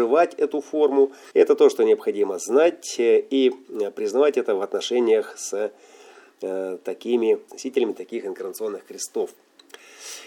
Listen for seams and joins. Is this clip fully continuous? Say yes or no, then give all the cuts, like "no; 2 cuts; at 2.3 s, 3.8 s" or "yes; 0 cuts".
no; 2 cuts; at 1.3 s, 7.5 s